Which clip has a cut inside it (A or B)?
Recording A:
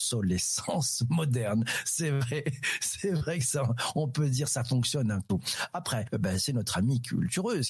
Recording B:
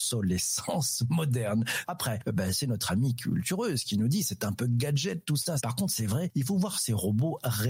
B